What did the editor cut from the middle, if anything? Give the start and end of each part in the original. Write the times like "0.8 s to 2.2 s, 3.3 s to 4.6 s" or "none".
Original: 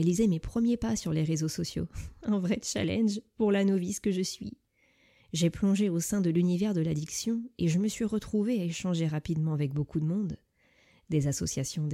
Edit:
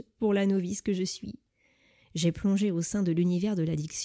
none

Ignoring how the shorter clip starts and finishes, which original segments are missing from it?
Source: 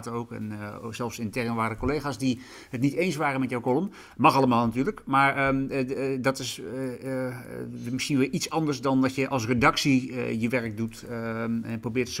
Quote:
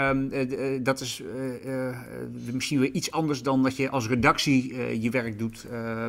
none

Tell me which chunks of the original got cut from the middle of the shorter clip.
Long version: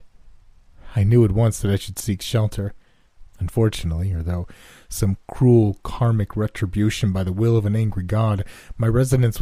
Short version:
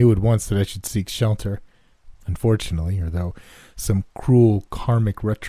none

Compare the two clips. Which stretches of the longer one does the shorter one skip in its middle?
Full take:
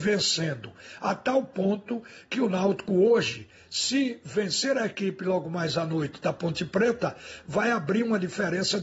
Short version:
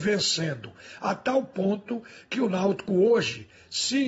none

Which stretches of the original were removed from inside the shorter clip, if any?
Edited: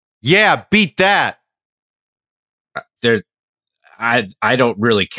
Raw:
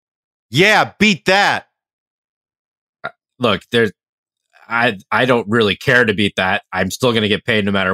3.2 s to 3.7 s

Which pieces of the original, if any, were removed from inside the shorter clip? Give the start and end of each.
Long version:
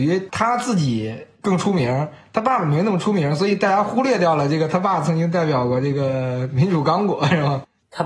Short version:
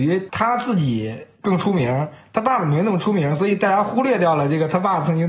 none

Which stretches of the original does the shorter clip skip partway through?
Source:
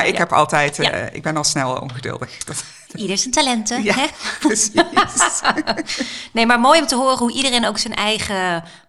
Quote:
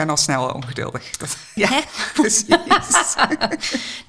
2.8 s to 3.8 s

